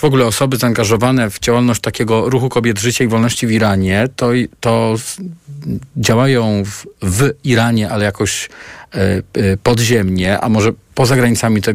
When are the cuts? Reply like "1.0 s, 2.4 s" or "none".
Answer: none